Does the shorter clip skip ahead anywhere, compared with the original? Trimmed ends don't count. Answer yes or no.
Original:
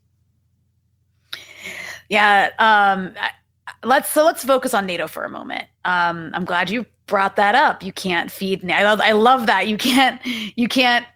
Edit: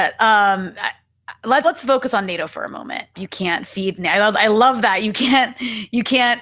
yes